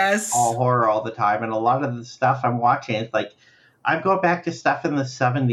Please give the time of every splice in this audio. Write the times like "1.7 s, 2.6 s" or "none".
none